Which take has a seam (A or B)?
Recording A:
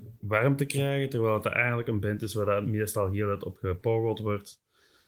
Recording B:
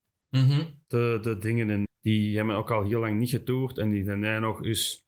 B